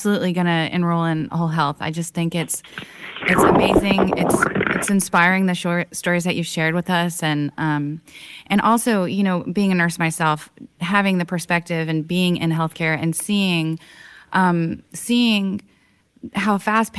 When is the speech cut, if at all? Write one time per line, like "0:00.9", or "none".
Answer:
none